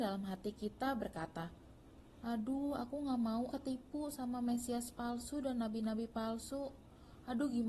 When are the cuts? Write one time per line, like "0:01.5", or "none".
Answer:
0:03.5